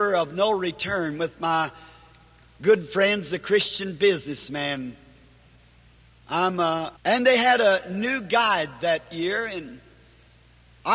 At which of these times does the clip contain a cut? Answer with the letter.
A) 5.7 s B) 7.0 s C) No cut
B